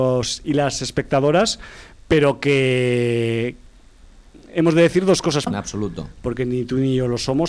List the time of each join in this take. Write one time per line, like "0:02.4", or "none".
0:05.5

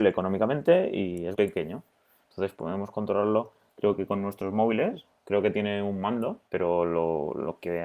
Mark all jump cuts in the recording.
0:01.3
0:06.5

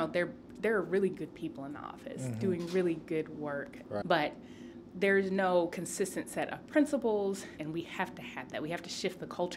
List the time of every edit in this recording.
0:04.0
0:07.6

